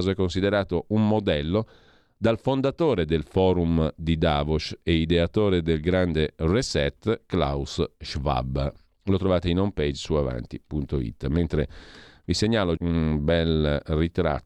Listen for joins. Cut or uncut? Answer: cut